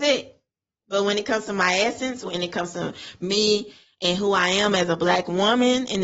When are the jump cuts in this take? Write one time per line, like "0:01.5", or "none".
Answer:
0:02.2